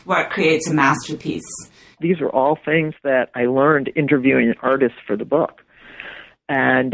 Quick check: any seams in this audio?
yes; 1 cut; at 2.0 s

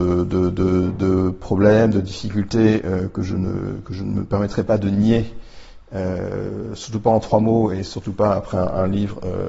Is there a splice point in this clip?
no; 0 cuts

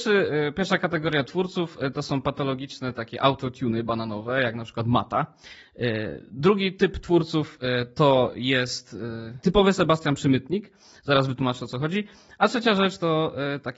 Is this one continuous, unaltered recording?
yes; 0 cuts

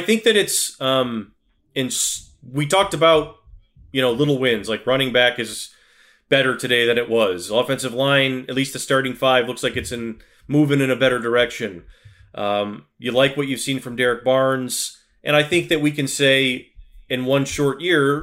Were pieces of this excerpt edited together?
no; 0 cuts

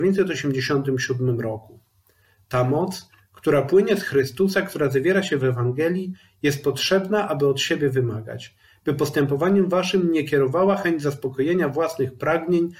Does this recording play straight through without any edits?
yes; 0 cuts

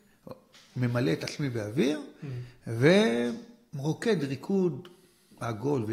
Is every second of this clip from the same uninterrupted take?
yes; 0 cuts

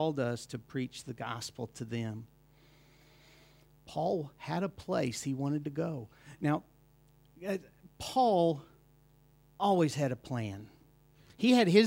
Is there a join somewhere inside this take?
no; 0 cuts

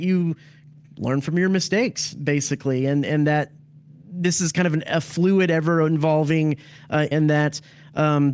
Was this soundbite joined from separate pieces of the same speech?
yes; 1 cut; at 7.1 s

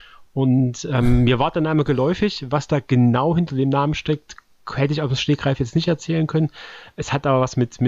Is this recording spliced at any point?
no; 0 cuts

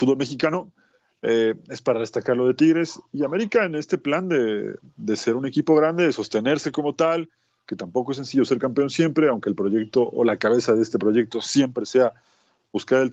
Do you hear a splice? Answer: no; 0 cuts

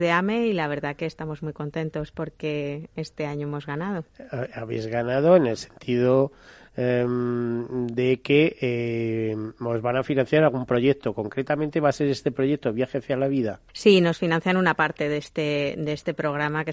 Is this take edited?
yes; 1 cut; at 13.7 s

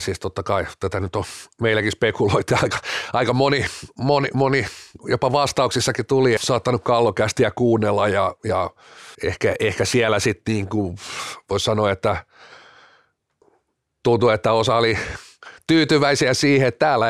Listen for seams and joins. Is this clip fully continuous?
no; 2 cuts; at 6.4 s, 9.1 s

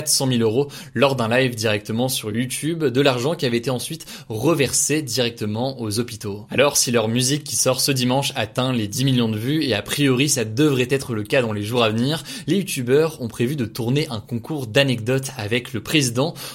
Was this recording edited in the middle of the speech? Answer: no; 0 cuts

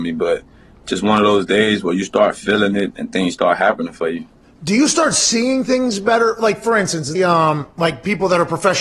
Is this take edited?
yes; 1 cut; at 7.2 s

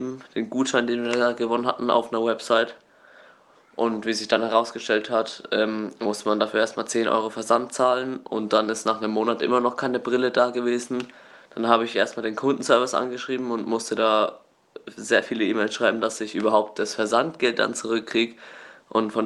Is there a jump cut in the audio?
no; 0 cuts

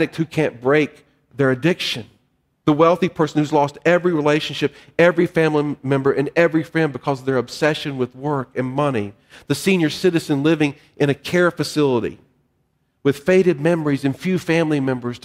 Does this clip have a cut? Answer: no; 0 cuts

